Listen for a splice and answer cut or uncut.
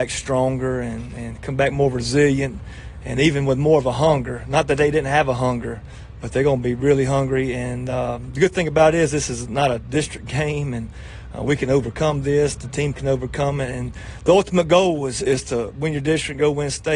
uncut